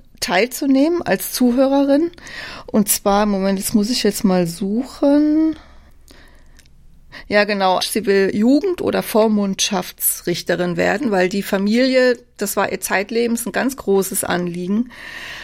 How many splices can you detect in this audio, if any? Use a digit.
1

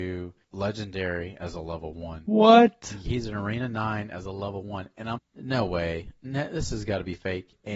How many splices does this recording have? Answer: 2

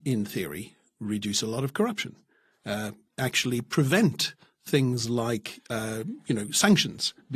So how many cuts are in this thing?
0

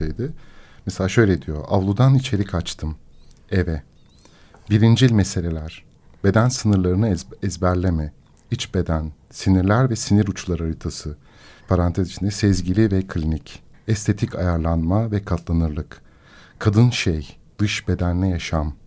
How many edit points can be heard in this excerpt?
2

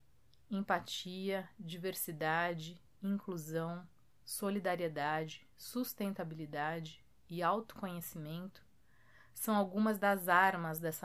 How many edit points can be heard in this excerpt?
0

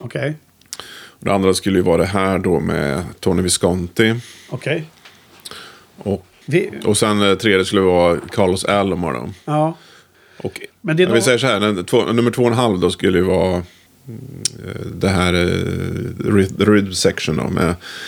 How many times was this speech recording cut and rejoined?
2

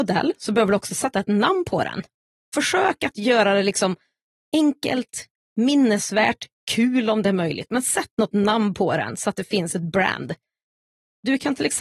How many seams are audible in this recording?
0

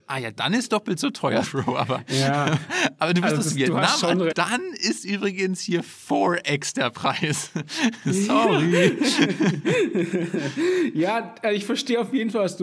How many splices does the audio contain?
2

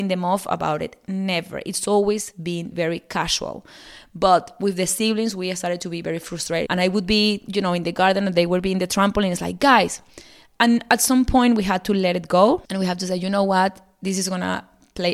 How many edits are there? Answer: 2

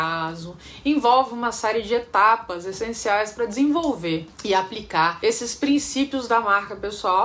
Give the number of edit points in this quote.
0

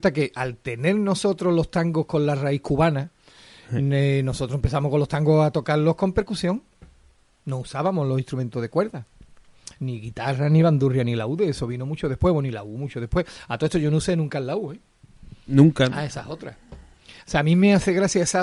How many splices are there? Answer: 0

